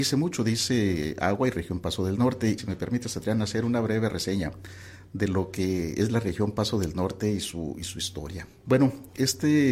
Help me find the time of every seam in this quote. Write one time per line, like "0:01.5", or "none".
0:02.6
0:08.7